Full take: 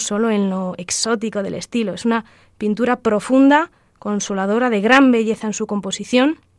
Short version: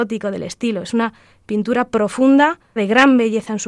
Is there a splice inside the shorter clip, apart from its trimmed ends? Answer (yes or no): yes